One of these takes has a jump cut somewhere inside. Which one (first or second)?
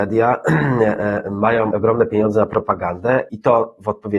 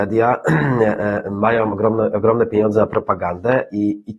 first